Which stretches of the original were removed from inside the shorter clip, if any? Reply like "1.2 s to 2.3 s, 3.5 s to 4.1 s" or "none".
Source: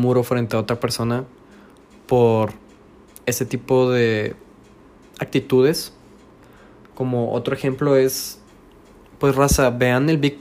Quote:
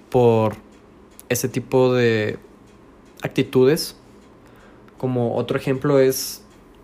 none